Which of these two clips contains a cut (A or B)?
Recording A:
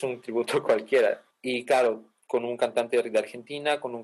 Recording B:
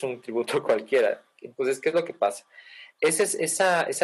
A